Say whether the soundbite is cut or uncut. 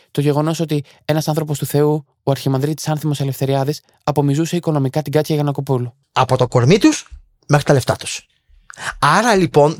cut